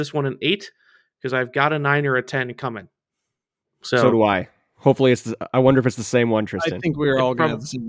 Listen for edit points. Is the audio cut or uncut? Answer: uncut